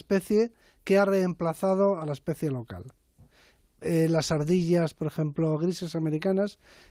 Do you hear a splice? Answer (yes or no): no